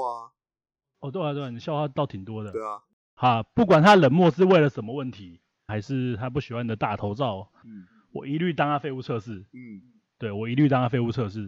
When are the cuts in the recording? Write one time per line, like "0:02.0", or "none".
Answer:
0:05.7
0:07.6